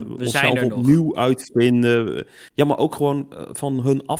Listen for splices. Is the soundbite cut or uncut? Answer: uncut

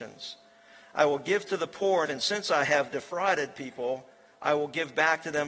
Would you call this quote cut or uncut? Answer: cut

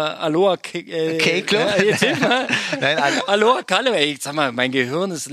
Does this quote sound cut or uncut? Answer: uncut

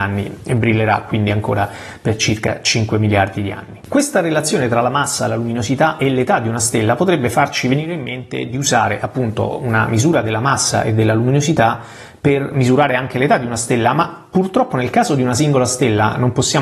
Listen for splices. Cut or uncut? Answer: uncut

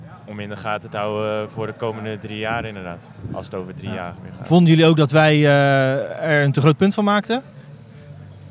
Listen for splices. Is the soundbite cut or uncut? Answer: uncut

